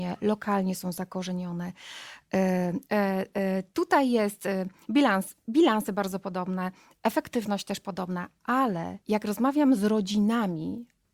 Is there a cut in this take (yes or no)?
yes